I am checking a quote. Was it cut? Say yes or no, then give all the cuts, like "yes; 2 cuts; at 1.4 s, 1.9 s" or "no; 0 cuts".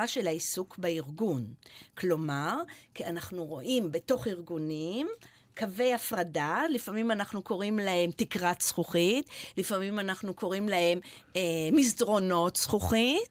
no; 0 cuts